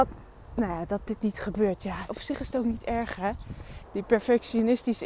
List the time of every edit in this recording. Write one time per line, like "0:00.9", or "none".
0:02.1
0:03.8